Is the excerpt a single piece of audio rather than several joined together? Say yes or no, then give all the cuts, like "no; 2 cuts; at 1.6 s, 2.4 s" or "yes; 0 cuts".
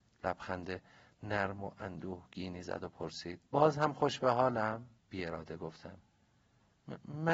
no; 2 cuts; at 3.5 s, 5.0 s